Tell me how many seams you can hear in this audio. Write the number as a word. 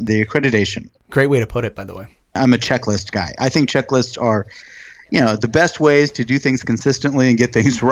one